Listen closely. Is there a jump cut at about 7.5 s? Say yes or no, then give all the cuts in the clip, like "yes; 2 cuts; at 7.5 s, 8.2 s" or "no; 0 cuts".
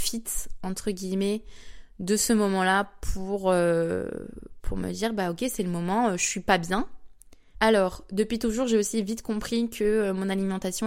yes; 1 cut; at 7.5 s